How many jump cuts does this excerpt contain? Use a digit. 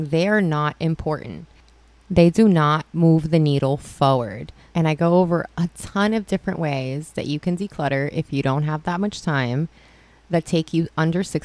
1